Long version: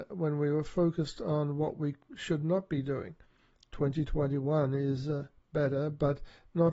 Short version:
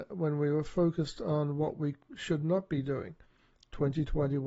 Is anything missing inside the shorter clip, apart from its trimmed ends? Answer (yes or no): no